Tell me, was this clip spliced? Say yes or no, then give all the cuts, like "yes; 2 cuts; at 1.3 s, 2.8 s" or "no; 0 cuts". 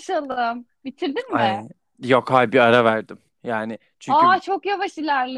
no; 0 cuts